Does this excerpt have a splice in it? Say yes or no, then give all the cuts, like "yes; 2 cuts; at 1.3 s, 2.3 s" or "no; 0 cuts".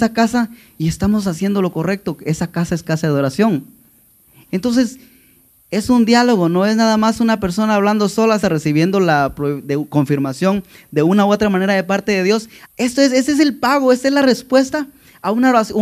yes; 3 cuts; at 4.5 s, 8.4 s, 12.6 s